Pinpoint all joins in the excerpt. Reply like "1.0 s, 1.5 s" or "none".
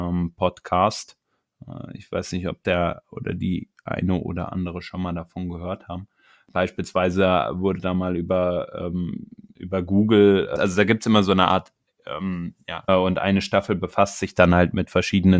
10.6 s, 12.9 s